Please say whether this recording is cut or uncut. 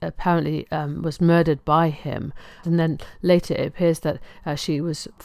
cut